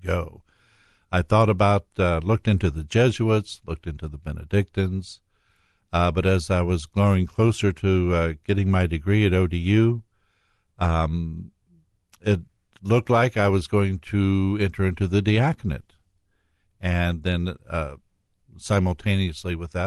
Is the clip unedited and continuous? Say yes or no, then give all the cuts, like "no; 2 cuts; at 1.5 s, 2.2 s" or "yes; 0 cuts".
yes; 0 cuts